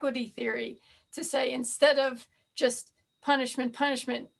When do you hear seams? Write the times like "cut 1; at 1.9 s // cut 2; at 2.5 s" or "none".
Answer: none